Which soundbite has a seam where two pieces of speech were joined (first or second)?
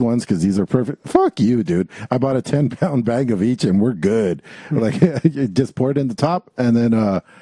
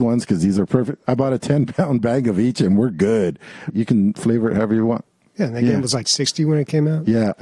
second